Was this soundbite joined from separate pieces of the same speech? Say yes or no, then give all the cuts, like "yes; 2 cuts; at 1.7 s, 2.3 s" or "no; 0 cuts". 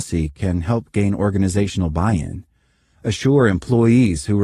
no; 0 cuts